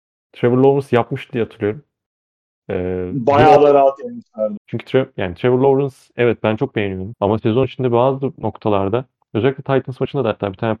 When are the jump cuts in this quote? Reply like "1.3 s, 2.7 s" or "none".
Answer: 4.6 s, 7.1 s